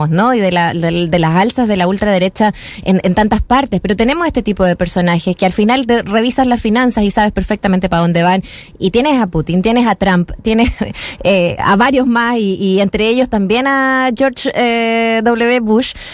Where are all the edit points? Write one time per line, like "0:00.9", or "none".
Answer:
0:11.6

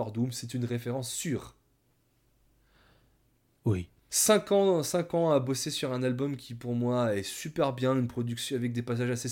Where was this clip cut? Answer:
0:04.1

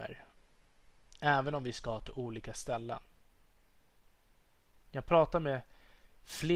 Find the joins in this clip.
0:04.8

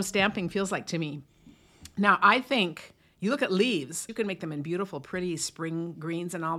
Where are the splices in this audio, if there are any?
0:04.1

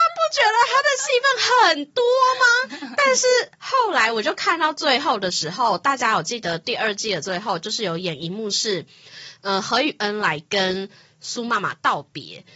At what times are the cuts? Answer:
none

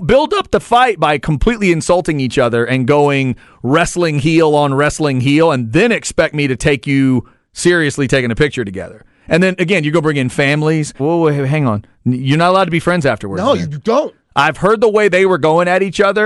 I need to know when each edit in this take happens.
0:11.0

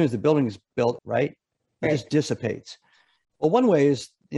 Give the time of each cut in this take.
0:01.0
0:03.2

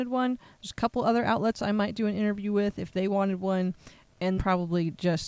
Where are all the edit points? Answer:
0:04.4

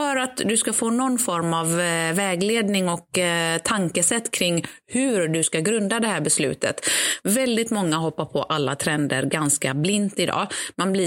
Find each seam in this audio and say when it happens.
0:07.2

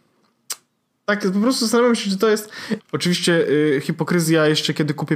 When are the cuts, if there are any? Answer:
0:02.8

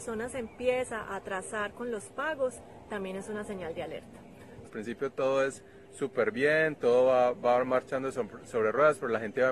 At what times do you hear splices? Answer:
0:04.6

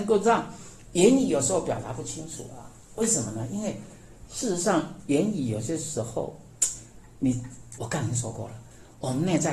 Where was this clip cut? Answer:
0:07.8

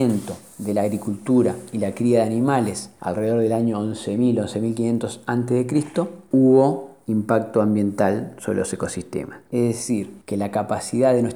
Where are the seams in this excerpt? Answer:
0:09.5

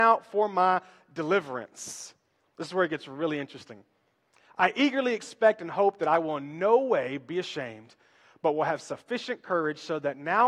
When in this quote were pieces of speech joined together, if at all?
none

